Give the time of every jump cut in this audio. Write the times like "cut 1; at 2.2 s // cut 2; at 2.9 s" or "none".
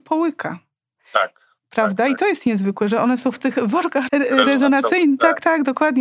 cut 1; at 4.1 s